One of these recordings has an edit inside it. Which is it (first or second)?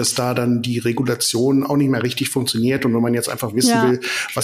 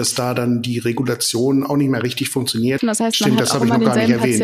second